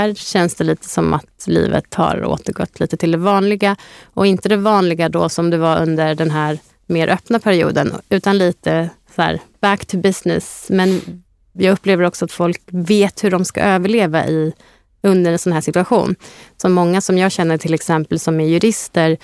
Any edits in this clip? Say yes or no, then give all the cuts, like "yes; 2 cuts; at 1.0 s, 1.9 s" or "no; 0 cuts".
no; 0 cuts